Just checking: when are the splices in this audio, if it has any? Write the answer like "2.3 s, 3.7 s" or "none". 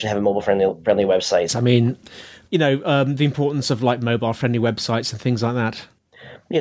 1.5 s